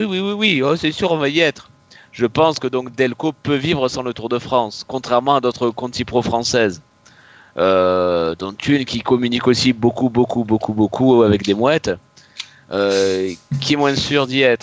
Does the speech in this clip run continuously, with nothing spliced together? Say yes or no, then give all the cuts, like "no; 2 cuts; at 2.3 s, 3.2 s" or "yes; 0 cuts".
yes; 0 cuts